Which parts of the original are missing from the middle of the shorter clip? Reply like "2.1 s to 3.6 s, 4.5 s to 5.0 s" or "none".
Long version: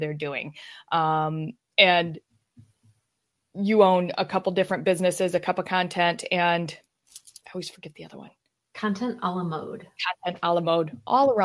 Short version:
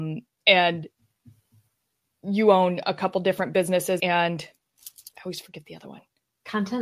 5.3 s to 6.3 s